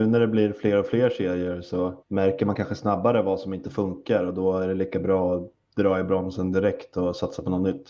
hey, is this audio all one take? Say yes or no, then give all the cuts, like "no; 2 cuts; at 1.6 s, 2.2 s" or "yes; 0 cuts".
no; 1 cut; at 2.0 s